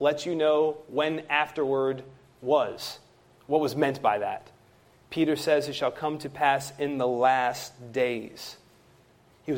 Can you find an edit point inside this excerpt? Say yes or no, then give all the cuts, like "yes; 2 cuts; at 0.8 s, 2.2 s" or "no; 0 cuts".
no; 0 cuts